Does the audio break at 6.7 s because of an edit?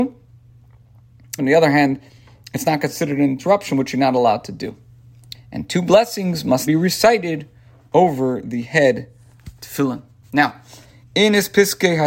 yes; 3 cuts; at 1.4 s, 5.3 s, 6.7 s

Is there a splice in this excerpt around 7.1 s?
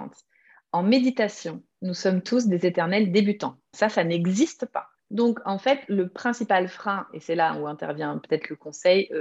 no; 2 cuts; at 3.7 s, 5.0 s

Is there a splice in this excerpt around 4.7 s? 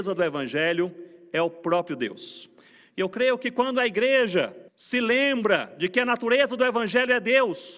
yes; 1 cut; at 4.7 s

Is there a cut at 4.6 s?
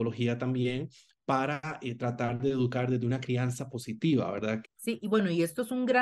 yes; 1 cut; at 4.6 s

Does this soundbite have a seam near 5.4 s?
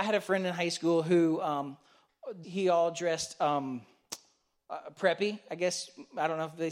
no; 1 cut; at 2.4 s

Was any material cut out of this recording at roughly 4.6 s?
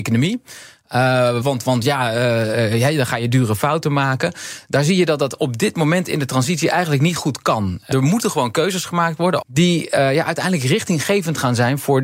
no; 3 cuts; at 1.4 s, 7.9 s, 9.4 s

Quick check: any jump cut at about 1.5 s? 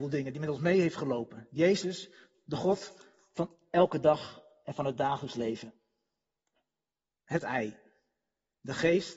no; 1 cut; at 7.2 s

